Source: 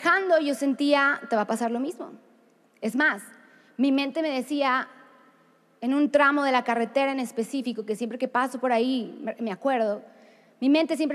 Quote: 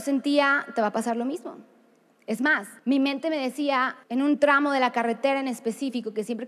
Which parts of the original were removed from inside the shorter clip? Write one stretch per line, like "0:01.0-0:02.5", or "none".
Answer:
0:03.3-0:03.7
0:05.0-0:05.8